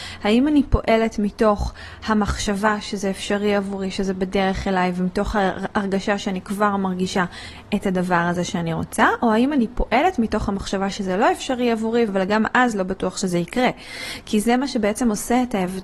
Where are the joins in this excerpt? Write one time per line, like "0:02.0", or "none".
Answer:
0:12.1